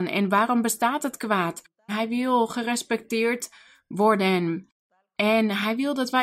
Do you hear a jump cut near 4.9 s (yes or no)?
no